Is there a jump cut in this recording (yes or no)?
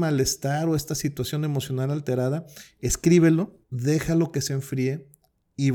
yes